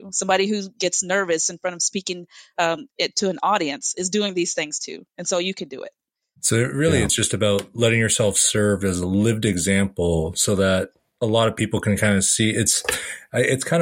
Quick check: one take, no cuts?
yes; 0 cuts

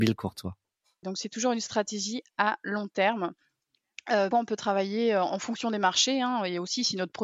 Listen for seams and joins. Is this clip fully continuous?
no; 2 cuts; at 1.0 s, 4.3 s

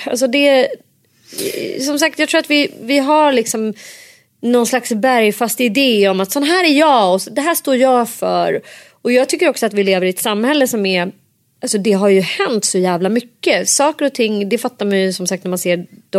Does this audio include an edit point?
no; 0 cuts

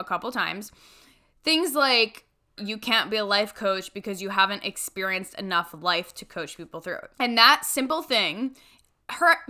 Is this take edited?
yes; 2 cuts; at 2.6 s, 7.1 s

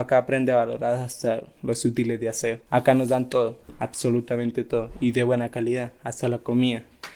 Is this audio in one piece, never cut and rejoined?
yes; 0 cuts

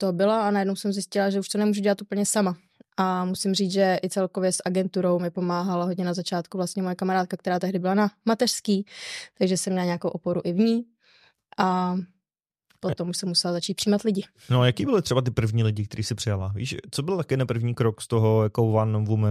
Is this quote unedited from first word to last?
yes; 0 cuts

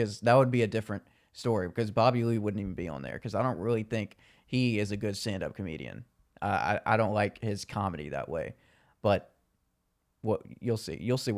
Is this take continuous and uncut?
yes; 0 cuts

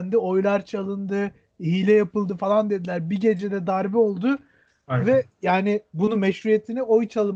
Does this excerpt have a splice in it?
no; 0 cuts

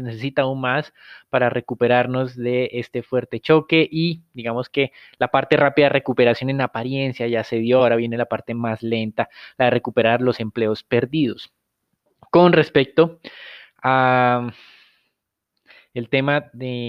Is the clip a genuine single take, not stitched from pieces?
yes; 0 cuts

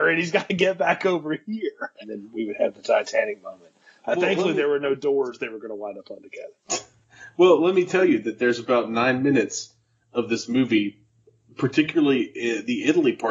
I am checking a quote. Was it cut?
yes; 1 cut; at 2.0 s

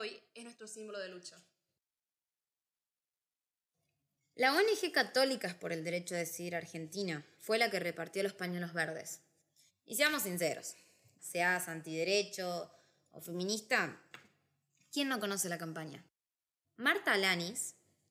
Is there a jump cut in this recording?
yes; 3 cuts; at 9.7 s, 11.2 s, 16.6 s

